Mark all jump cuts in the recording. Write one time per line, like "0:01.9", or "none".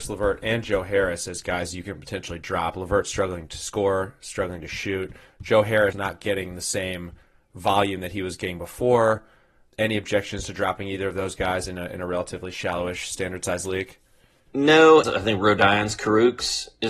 0:05.9
0:15.0